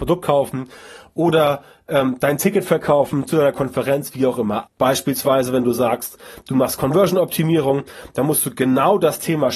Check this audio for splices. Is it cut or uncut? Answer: cut